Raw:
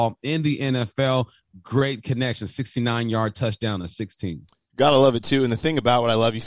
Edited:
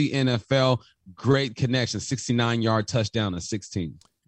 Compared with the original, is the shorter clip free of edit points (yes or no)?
yes